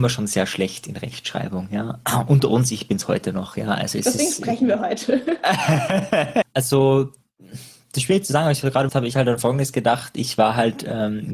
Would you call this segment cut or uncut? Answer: cut